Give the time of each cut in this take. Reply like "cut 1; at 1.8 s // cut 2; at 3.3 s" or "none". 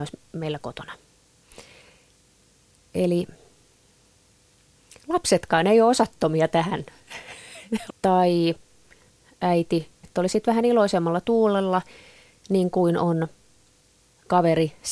cut 1; at 7.9 s // cut 2; at 10.0 s